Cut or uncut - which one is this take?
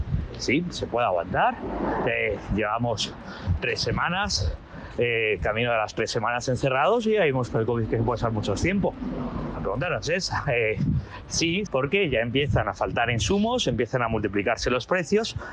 cut